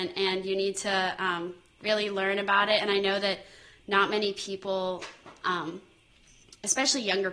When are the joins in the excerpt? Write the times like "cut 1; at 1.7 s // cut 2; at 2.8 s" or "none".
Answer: none